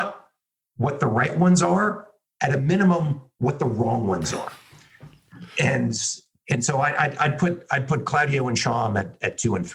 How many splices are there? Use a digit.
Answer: 0